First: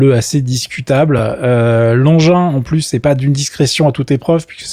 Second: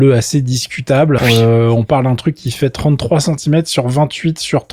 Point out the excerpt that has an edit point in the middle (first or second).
second